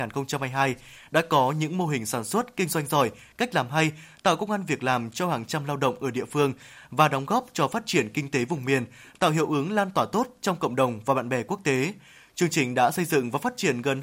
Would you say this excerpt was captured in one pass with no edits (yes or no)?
yes